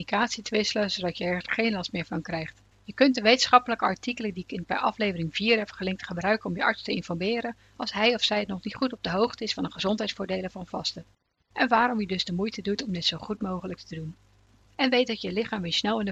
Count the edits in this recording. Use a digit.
2